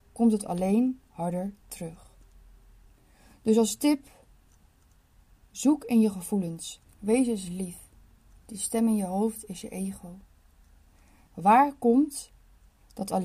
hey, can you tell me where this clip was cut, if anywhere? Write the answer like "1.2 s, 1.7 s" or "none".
6.9 s, 11.3 s